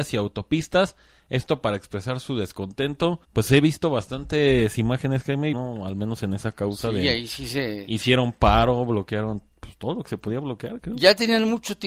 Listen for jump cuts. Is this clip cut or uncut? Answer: cut